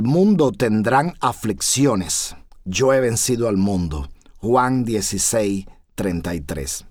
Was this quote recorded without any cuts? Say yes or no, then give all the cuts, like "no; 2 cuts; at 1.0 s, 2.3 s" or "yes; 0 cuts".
no; 1 cut; at 2.5 s